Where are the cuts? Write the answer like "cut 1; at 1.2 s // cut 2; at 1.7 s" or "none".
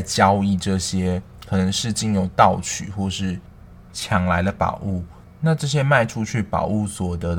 none